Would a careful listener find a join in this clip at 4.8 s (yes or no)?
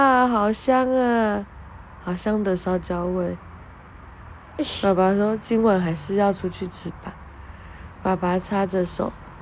no